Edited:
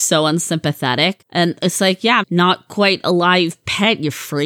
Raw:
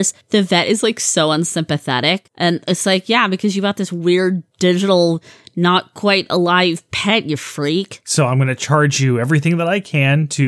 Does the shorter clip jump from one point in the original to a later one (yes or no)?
yes